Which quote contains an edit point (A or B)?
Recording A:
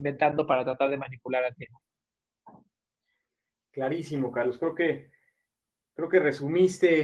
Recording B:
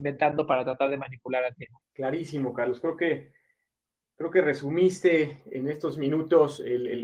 B